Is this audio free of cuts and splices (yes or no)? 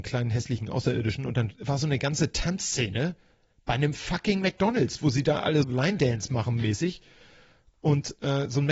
no